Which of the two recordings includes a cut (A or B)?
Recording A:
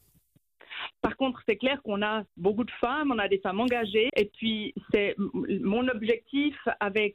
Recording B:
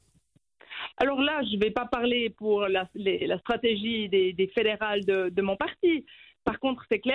A